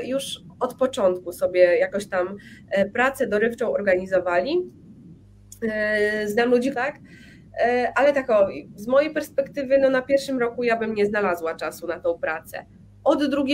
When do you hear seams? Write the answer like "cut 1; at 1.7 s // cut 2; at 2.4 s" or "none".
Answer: cut 1; at 6.7 s